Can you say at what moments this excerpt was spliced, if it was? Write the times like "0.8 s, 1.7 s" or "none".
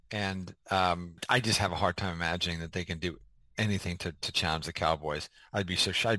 none